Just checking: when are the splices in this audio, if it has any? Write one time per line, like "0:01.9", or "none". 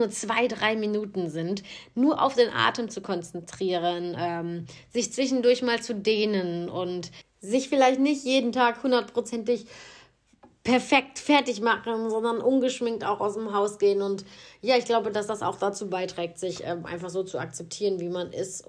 none